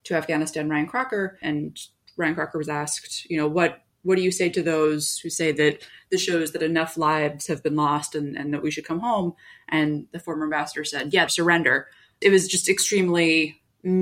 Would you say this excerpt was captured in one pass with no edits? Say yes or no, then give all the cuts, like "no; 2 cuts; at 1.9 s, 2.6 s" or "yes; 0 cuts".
no; 1 cut; at 11.3 s